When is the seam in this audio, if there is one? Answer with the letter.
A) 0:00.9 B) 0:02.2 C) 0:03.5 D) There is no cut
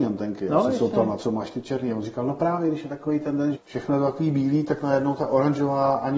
C